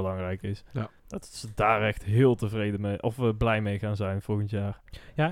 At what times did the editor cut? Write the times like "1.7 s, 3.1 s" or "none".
1.0 s